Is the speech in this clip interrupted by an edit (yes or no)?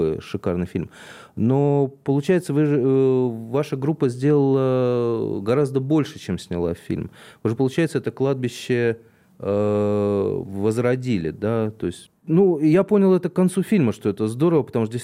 yes